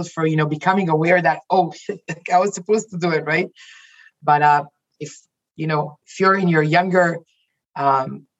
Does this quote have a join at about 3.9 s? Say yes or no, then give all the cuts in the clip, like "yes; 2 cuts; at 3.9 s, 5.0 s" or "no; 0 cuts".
no; 0 cuts